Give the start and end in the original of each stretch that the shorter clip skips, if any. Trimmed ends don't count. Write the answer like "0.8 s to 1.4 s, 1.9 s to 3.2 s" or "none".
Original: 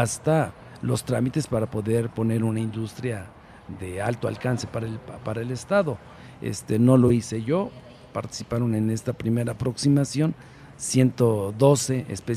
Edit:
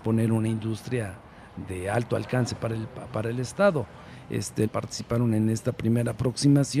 6.8 s to 8.1 s